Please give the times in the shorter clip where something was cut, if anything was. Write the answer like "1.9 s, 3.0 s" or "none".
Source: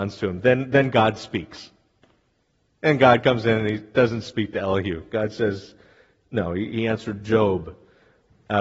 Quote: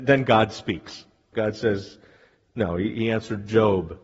1.3 s